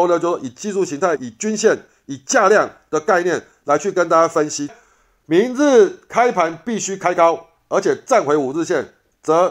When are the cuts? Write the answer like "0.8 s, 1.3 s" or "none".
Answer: 1.2 s, 4.7 s